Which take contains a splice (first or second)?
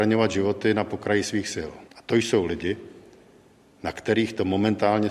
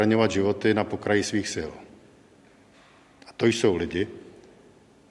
first